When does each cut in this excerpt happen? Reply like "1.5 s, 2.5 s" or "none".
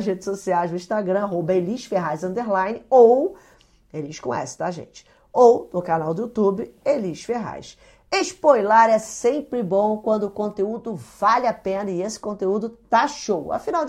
none